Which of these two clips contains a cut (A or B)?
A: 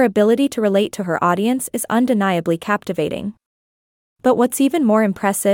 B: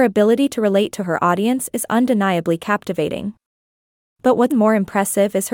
B